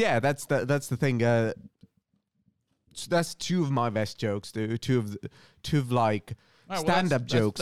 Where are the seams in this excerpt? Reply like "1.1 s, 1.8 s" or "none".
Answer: none